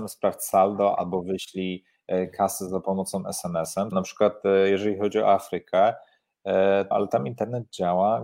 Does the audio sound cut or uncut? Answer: cut